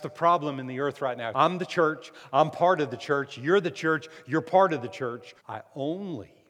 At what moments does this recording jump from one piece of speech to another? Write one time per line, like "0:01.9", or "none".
0:01.3
0:05.4

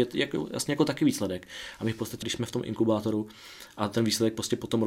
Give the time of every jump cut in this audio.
0:02.2

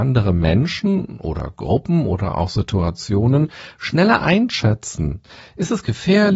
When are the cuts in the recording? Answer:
none

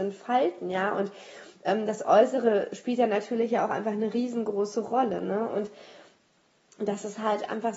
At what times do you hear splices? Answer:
none

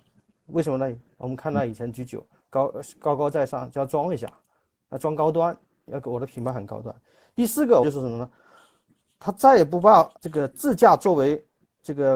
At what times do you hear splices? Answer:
0:07.8
0:10.2

